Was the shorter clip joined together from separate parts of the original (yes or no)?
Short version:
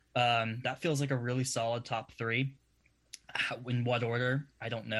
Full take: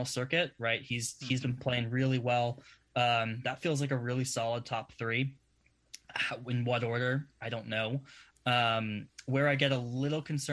no